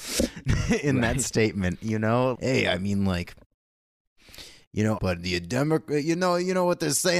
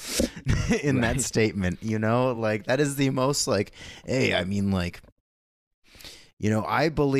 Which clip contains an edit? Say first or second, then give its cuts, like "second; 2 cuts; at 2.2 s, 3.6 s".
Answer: first; 2 cuts; at 2.3 s, 5.0 s